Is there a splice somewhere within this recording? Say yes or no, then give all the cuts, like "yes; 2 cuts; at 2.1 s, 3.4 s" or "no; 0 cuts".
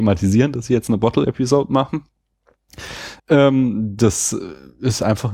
yes; 1 cut; at 3.2 s